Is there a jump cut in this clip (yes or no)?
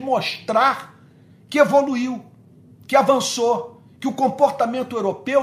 no